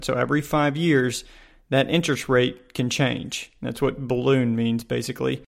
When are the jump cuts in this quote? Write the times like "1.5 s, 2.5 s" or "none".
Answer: none